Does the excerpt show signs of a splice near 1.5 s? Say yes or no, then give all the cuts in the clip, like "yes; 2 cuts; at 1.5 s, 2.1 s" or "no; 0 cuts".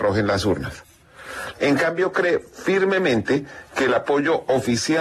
yes; 1 cut; at 1.5 s